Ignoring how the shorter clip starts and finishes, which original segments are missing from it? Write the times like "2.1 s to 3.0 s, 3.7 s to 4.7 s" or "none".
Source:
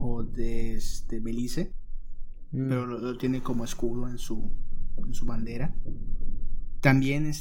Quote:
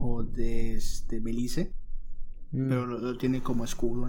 none